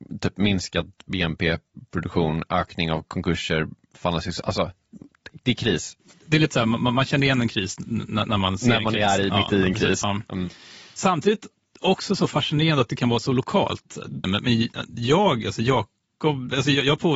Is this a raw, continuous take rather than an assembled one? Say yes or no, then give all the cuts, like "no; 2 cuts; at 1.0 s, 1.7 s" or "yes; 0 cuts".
no; 2 cuts; at 10.0 s, 14.2 s